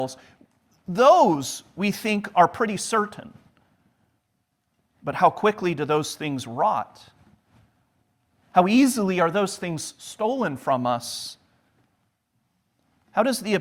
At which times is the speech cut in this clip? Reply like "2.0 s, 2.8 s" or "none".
none